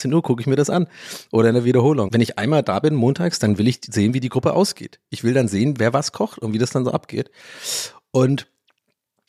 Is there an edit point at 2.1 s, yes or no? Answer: yes